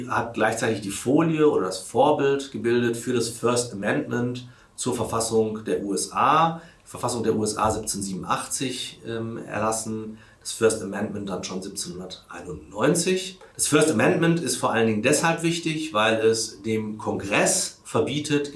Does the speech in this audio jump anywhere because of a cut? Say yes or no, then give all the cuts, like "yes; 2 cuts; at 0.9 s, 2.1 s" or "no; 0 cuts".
yes; 1 cut; at 13.5 s